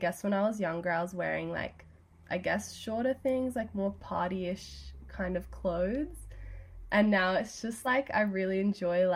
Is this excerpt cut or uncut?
uncut